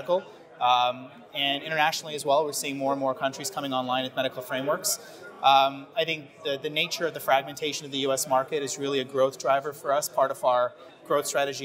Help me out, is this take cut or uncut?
uncut